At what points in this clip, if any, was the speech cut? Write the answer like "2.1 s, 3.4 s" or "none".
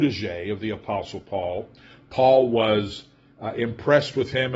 none